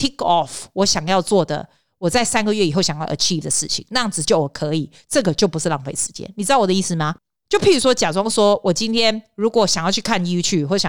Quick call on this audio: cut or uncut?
cut